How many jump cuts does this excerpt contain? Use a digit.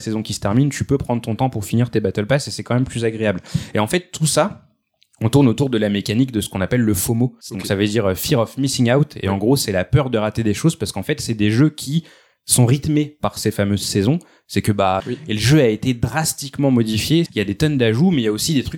3